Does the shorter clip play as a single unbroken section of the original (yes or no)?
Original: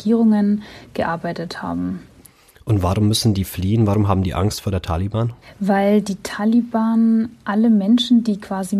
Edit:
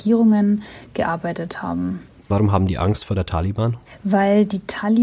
no